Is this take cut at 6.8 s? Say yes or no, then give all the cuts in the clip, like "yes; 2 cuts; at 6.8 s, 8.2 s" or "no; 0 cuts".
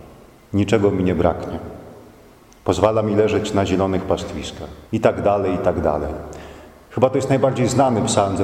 no; 1 cut; at 4.9 s